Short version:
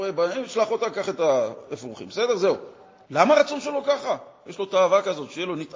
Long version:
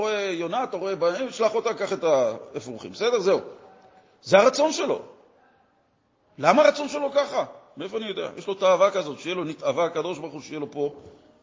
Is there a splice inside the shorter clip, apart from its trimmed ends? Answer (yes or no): yes